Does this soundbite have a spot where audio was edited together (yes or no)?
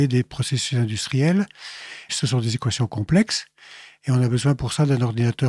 yes